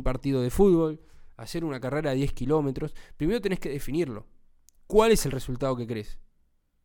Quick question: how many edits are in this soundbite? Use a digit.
0